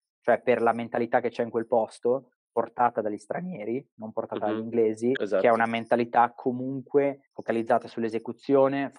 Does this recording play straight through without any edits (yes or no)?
no